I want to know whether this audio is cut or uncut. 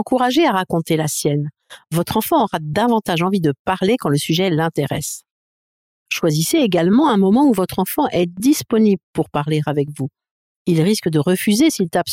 cut